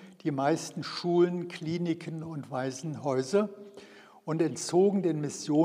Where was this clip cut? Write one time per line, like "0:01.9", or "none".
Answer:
none